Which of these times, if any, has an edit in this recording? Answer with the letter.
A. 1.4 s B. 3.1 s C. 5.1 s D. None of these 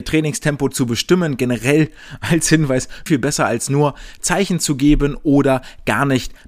B